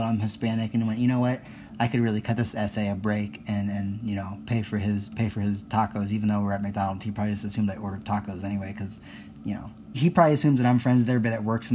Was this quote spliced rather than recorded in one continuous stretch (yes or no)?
yes